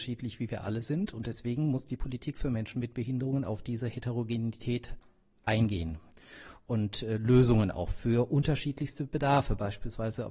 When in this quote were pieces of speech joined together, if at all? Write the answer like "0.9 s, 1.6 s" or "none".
none